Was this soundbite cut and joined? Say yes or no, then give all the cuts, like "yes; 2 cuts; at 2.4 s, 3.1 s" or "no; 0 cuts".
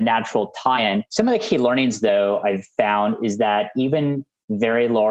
no; 0 cuts